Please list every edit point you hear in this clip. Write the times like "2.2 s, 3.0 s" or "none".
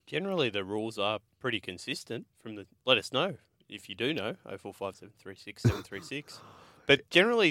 2.3 s, 4.9 s